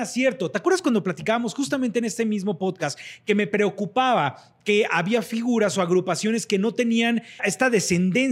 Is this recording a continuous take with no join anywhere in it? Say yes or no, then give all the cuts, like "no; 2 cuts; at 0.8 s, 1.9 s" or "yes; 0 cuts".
no; 1 cut; at 7.4 s